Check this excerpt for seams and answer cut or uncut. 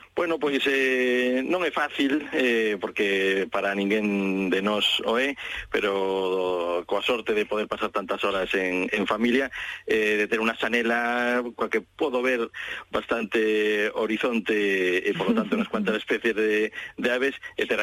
uncut